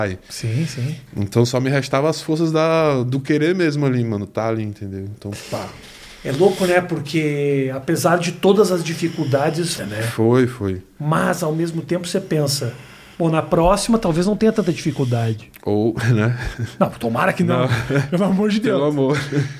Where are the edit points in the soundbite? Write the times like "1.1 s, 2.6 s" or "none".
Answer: 9.8 s